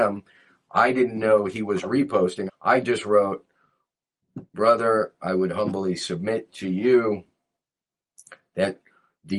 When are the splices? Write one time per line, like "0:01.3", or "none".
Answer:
0:02.5
0:04.5